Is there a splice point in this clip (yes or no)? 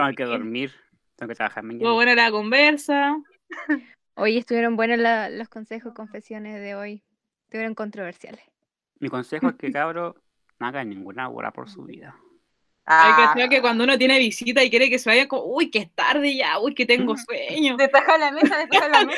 no